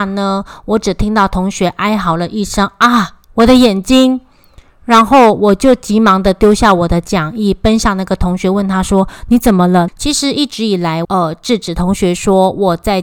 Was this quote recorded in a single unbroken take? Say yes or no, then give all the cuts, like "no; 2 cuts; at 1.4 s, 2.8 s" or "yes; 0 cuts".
no; 2 cuts; at 9.9 s, 11.0 s